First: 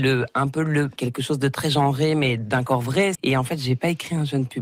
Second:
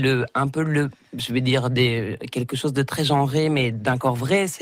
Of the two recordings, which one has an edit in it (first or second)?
first